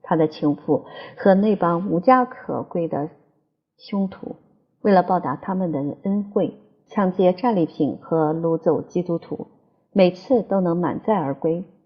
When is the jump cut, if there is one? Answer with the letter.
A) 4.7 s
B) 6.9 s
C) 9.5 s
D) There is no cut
B